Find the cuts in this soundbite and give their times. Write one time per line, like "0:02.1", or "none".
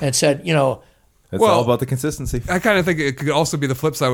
0:01.2